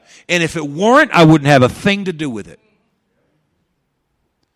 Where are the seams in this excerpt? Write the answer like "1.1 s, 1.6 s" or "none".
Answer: none